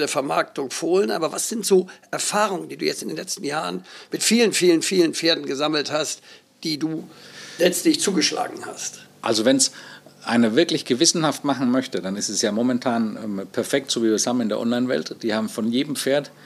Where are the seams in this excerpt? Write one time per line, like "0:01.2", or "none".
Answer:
none